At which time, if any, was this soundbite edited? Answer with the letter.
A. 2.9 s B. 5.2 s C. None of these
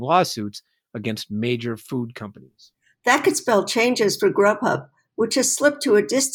A